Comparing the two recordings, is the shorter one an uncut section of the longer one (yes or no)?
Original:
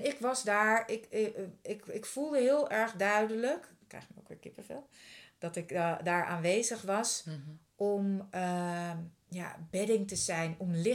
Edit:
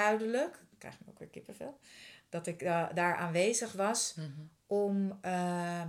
yes